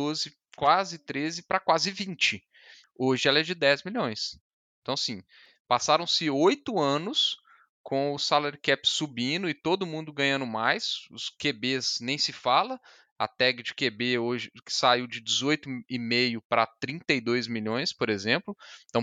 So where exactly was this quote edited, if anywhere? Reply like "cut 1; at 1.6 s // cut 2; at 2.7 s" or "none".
cut 1; at 2.8 s